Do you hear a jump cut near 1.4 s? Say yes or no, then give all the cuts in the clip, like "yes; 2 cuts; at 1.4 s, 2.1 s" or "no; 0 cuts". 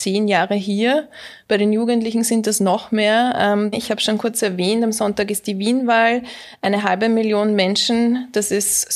no; 1 cut; at 3.7 s